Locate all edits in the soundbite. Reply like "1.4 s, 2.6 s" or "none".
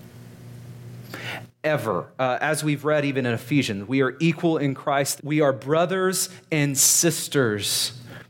5.2 s